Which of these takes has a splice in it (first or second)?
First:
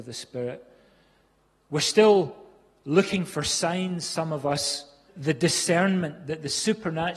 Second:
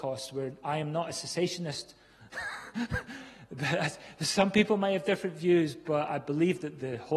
first